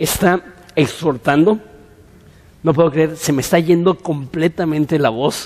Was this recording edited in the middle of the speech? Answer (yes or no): no